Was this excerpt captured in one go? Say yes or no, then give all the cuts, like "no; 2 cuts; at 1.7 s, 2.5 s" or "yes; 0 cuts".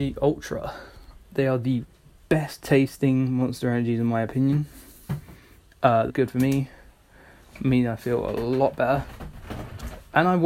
no; 1 cut; at 6.1 s